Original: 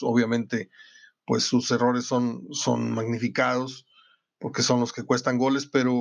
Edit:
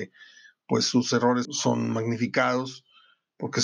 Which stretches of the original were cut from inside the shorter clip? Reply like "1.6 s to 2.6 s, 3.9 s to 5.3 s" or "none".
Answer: 2.0 s to 2.5 s